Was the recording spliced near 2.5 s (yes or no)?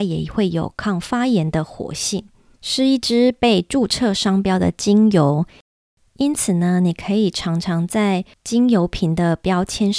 yes